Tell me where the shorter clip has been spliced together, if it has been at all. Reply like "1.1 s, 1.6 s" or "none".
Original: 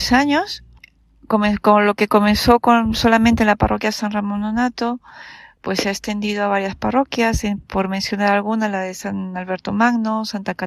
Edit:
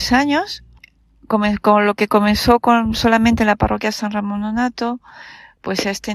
none